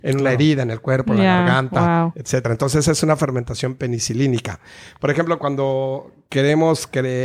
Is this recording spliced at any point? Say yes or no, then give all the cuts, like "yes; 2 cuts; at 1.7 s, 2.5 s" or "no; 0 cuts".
no; 0 cuts